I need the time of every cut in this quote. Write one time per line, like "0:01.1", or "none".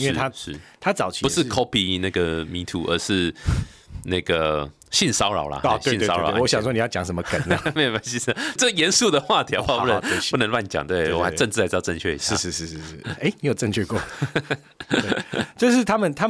0:08.6